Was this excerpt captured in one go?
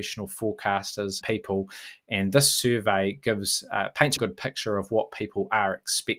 no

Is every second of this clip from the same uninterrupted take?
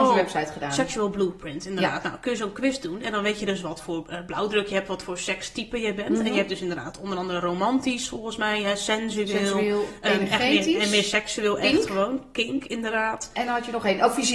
yes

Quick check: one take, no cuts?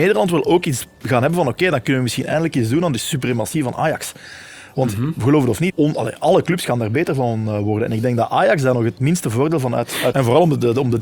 no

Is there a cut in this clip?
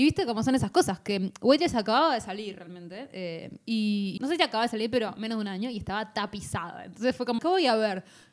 yes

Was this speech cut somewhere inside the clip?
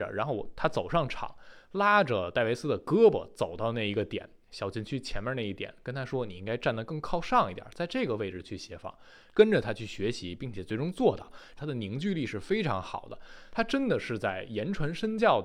yes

